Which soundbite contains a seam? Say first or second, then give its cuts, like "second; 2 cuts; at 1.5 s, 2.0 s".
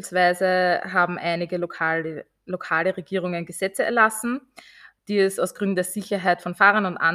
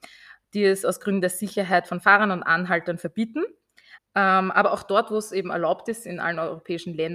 second; 1 cut; at 4.0 s